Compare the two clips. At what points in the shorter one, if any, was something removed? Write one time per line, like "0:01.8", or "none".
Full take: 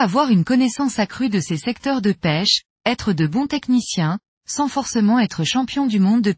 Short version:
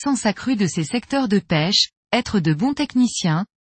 none